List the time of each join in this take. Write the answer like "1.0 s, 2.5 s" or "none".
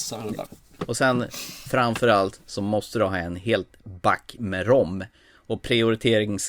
none